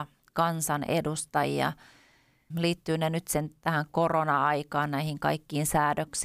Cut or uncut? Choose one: cut